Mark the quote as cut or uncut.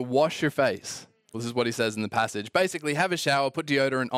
cut